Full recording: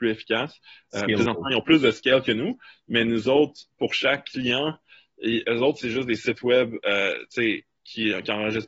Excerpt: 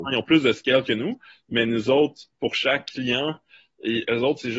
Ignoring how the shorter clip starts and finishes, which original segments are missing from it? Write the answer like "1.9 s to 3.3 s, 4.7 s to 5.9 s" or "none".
none